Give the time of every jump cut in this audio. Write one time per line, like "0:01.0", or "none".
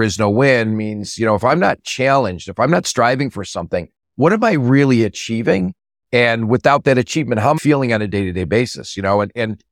0:07.6